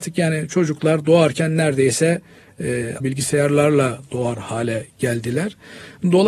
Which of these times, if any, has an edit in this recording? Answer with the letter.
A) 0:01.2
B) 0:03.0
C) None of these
B